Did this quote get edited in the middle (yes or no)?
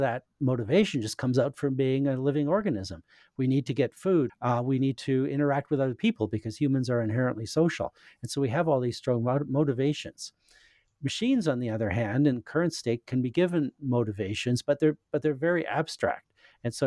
yes